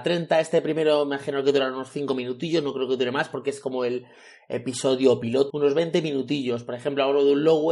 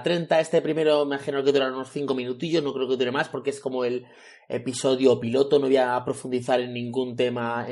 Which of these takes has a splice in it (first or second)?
first